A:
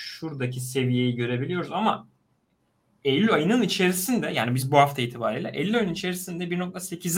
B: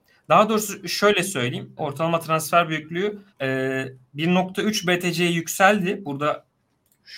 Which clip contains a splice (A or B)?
B